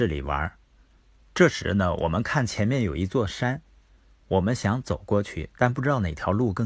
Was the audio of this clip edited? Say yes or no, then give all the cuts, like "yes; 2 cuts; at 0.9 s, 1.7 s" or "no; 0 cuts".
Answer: yes; 1 cut; at 1.2 s